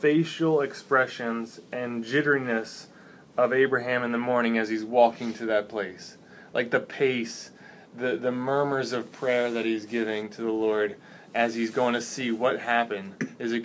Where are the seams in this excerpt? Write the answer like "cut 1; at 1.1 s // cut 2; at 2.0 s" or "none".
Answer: none